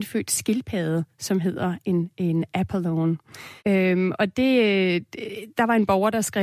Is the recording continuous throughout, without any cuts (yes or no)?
no